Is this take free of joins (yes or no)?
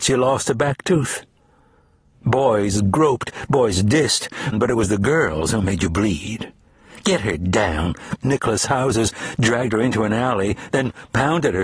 no